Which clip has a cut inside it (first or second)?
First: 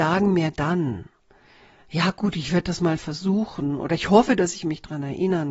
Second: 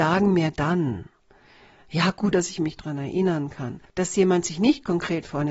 second